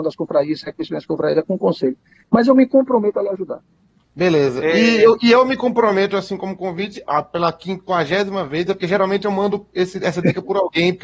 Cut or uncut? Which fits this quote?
cut